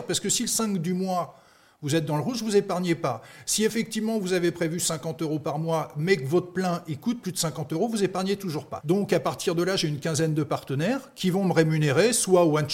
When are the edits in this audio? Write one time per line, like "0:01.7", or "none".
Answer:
0:08.8